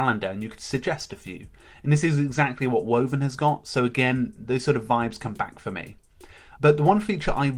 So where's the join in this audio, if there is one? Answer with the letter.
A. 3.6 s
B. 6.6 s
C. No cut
B